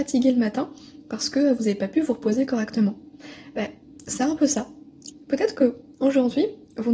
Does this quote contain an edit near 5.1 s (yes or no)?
yes